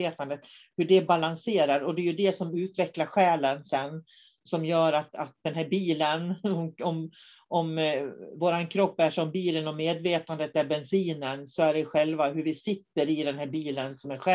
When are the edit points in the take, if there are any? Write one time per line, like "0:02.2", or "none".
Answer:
none